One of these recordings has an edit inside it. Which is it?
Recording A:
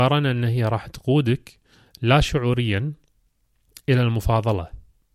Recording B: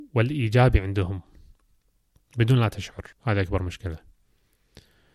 B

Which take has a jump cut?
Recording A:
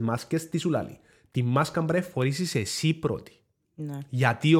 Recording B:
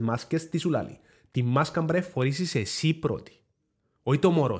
A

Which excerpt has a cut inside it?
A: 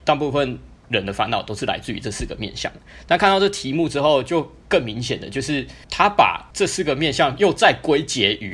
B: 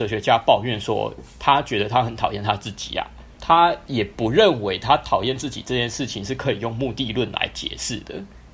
A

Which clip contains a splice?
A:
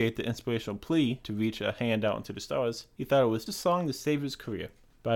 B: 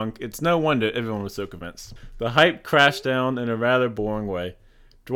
A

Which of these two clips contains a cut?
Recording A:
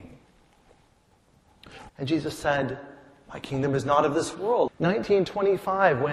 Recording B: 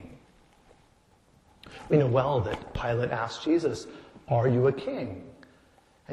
A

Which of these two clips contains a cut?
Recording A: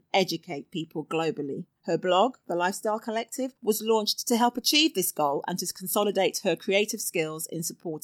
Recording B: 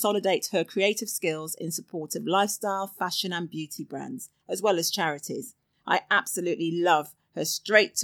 A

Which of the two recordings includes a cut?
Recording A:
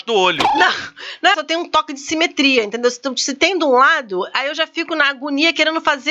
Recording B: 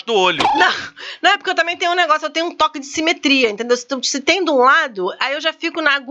A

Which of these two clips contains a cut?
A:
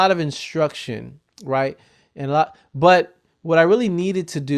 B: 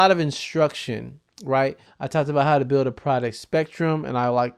B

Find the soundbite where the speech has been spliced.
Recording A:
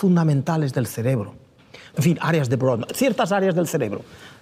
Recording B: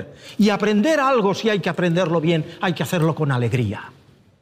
A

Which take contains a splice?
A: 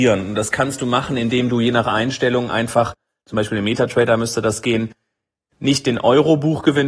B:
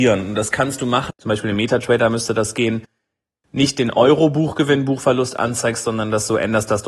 B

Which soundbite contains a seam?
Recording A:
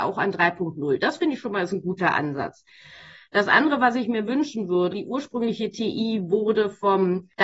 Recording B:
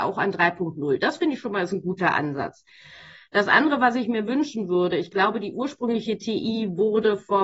A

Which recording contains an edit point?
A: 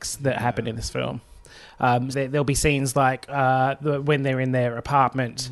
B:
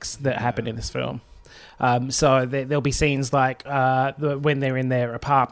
A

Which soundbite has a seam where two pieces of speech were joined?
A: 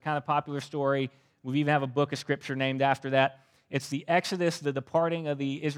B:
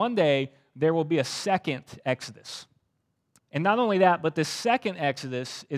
B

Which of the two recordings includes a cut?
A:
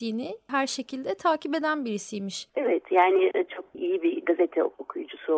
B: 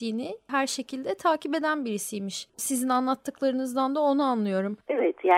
A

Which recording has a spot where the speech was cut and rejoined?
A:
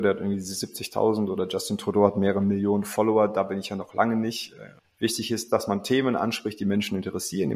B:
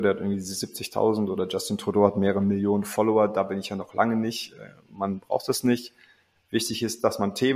A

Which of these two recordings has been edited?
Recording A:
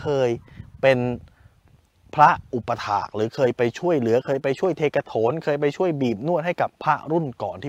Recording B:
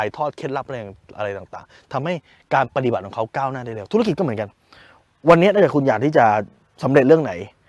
A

